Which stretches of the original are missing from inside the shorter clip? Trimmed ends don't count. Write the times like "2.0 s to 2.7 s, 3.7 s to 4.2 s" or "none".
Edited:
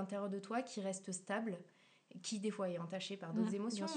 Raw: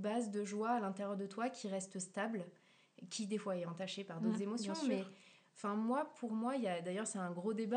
none